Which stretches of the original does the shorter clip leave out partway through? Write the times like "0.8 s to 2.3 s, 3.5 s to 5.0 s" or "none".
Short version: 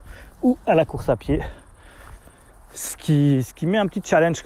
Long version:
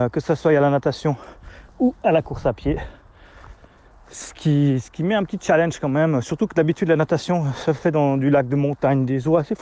none